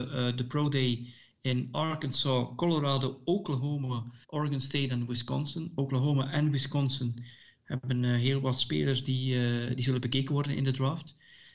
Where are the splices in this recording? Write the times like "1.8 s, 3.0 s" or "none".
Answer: 4.2 s